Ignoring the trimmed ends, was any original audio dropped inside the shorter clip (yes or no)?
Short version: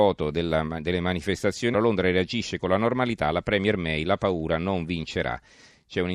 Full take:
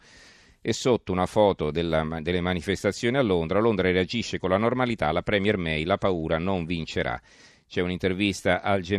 yes